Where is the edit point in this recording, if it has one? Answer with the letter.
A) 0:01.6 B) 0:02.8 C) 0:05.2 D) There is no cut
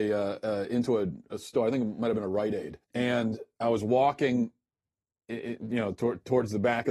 B